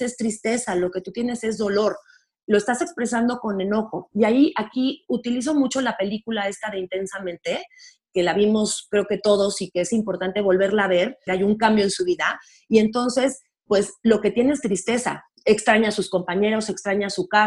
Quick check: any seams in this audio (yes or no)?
yes